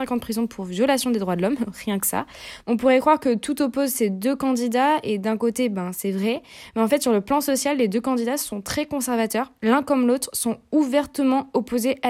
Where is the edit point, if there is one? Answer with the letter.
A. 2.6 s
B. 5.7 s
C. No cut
A